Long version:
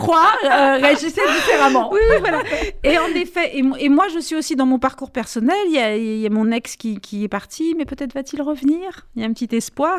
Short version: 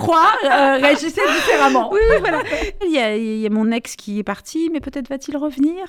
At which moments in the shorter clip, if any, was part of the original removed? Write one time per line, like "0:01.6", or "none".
0:02.8
0:04.0